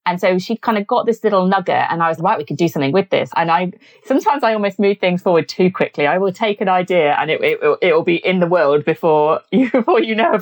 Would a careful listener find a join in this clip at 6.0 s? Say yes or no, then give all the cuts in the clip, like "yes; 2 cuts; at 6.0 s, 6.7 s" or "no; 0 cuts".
no; 2 cuts; at 2.2 s, 3.3 s